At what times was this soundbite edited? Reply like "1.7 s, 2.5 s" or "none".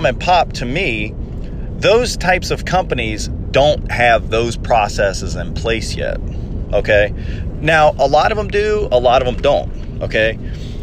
none